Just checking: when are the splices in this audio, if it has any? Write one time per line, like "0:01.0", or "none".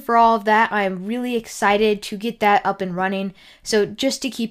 none